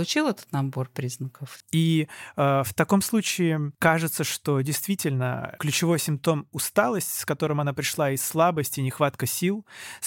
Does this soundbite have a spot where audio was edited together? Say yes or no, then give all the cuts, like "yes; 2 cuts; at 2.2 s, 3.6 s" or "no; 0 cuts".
yes; 3 cuts; at 1.6 s, 3.7 s, 5.6 s